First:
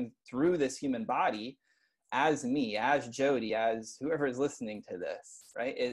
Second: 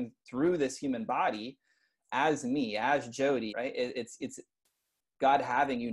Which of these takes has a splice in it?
second; 1 cut; at 3.5 s

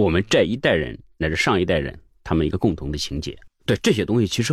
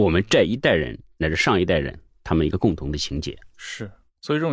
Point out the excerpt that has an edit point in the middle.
first; 1 cut; at 3.5 s

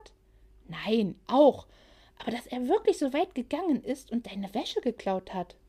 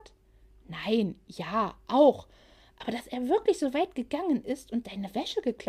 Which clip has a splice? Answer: first; 1 cut; at 1.3 s

